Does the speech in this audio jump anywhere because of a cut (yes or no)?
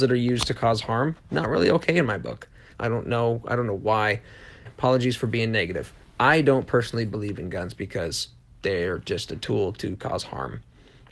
yes